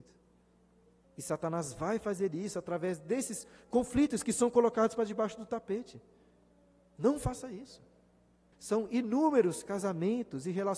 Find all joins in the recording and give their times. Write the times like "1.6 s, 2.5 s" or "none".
1.0 s, 8.5 s